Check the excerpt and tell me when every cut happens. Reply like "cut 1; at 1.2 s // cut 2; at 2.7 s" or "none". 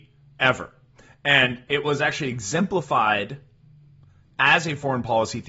none